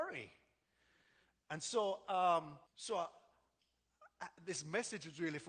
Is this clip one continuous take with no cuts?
no; 1 cut; at 2.7 s

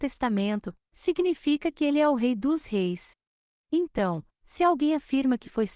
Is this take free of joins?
no; 1 cut; at 3.6 s

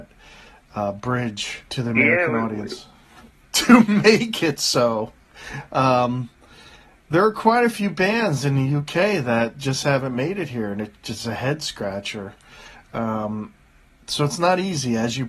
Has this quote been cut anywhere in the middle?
yes; 2 cuts; at 1.7 s, 3.4 s

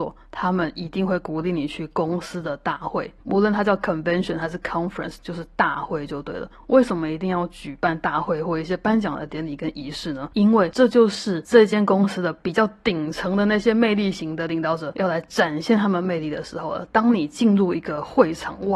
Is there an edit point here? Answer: no; 0 cuts

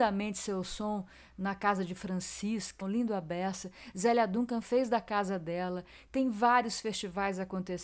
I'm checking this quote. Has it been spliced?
yes; 1 cut; at 2.8 s

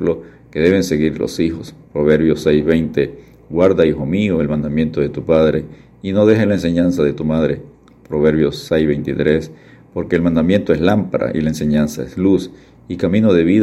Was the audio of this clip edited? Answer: no; 0 cuts

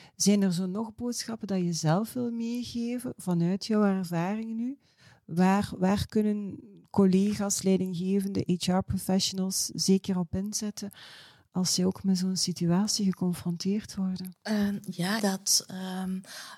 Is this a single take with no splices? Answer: no; 1 cut; at 15.2 s

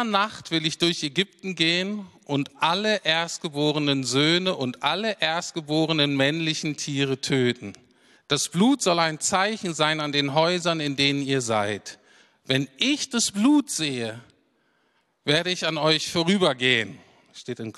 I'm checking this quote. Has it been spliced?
yes; 1 cut; at 8.2 s

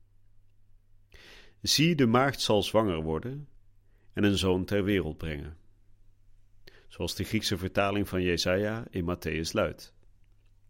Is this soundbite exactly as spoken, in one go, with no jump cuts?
yes; 0 cuts

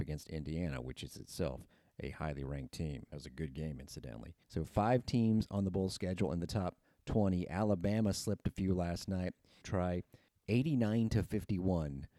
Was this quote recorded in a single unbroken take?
no; 2 cuts; at 4.4 s, 9.6 s

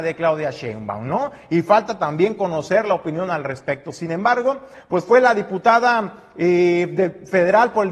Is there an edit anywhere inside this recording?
no; 0 cuts

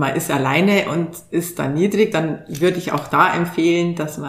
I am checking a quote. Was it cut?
no; 0 cuts

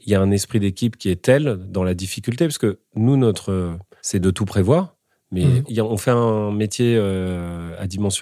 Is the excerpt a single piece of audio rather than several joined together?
no; 2 cuts; at 4.0 s, 5.7 s

